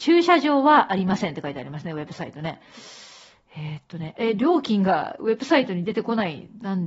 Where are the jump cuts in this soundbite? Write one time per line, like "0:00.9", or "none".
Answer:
none